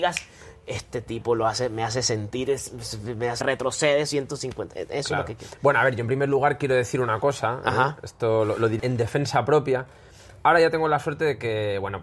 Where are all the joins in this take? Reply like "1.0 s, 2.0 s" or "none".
3.4 s, 8.8 s